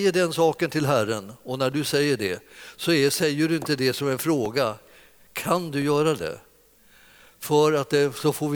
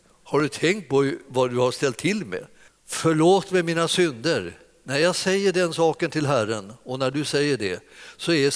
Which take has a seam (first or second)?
second